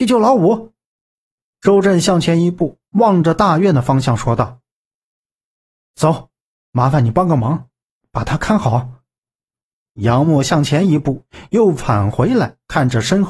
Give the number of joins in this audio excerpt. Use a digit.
0